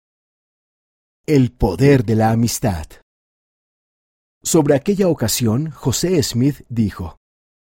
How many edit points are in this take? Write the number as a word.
zero